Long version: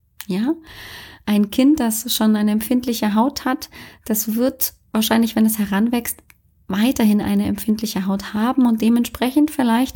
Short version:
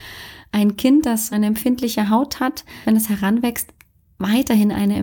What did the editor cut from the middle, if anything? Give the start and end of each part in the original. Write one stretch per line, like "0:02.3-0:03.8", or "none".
0:02.1-0:02.4
0:03.9-0:05.3

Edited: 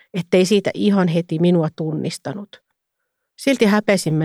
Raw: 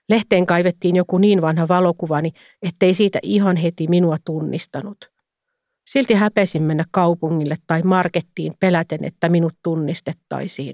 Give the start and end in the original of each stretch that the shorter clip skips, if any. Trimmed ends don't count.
none

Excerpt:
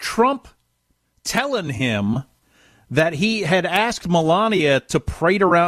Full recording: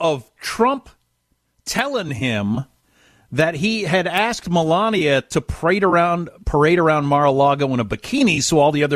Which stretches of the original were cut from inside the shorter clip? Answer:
none

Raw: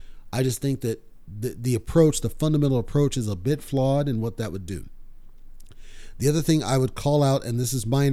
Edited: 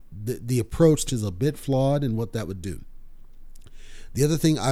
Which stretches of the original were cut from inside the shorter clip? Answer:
0:02.2-0:03.1

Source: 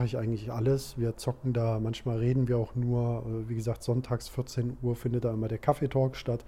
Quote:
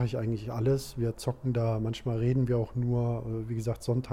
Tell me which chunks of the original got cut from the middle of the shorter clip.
none

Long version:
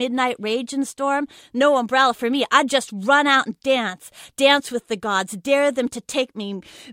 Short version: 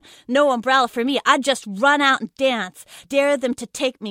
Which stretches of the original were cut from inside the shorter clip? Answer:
0:04.3-0:05.4

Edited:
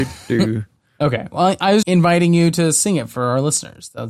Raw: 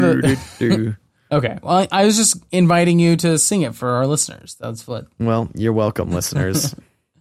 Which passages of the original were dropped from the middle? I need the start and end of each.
0:02.1-0:02.5

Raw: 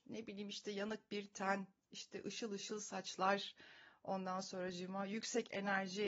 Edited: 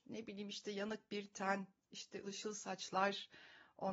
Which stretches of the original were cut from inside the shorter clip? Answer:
0:02.2-0:02.5

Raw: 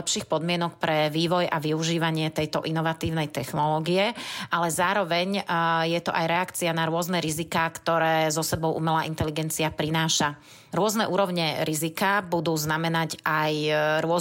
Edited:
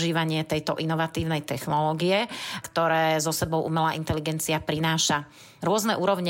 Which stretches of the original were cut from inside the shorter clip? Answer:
0:04.5-0:07.7

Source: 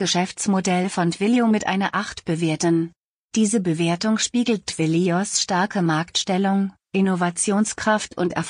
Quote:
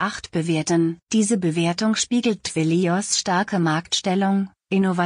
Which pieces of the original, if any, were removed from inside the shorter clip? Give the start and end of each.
0:03.0-0:03.3

